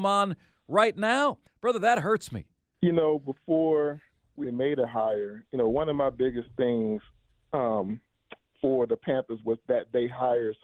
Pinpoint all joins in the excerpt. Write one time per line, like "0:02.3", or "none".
0:01.5
0:02.7
0:04.4

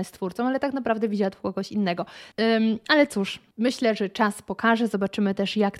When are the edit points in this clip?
0:02.3

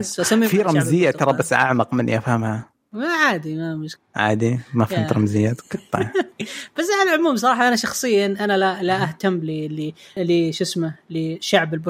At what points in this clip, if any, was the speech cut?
0:10.2

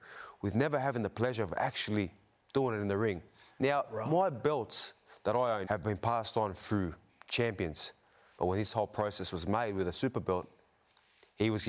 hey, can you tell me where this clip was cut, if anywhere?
0:05.6
0:08.4

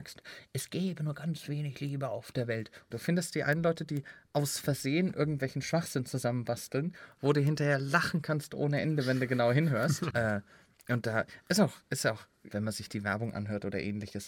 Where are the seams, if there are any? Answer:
0:02.9
0:10.1
0:12.5

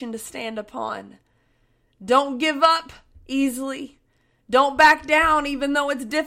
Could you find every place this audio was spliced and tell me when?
none

